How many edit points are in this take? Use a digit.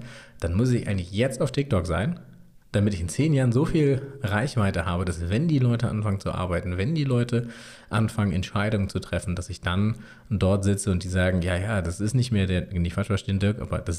0